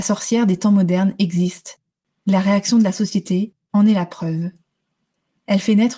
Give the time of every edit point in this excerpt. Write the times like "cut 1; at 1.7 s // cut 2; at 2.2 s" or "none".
cut 1; at 2.2 s // cut 2; at 3.7 s